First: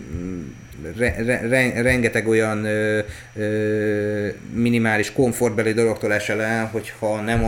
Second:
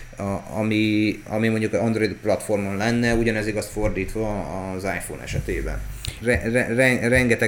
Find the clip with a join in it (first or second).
second